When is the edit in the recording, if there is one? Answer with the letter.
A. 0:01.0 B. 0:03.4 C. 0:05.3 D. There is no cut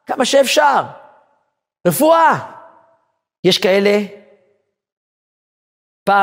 B